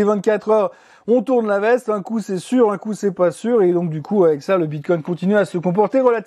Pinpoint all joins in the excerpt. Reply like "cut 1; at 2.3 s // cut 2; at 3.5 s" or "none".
none